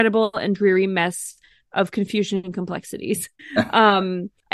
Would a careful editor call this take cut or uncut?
cut